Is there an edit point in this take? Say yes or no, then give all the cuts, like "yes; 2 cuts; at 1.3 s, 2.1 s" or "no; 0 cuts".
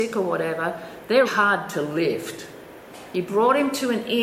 yes; 2 cuts; at 1.2 s, 3.1 s